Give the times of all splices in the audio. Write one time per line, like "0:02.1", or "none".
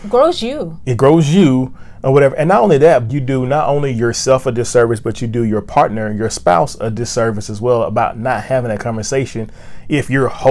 0:03.1